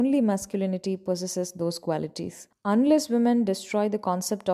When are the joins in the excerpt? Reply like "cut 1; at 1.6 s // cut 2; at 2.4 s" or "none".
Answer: cut 1; at 2.5 s